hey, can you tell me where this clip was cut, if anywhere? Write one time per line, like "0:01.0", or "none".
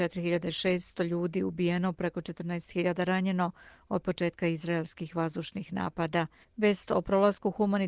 0:06.4